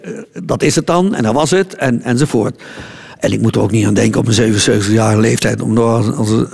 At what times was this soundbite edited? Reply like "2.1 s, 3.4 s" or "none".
none